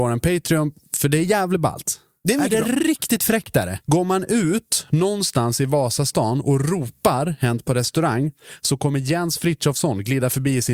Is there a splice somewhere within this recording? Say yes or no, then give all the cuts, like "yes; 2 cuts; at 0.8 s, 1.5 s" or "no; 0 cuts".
yes; 1 cut; at 3.8 s